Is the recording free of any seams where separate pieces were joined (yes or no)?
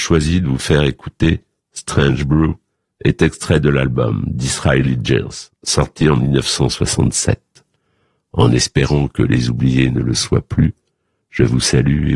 yes